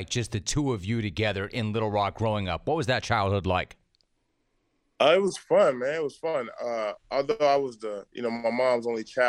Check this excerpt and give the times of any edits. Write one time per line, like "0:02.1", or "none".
none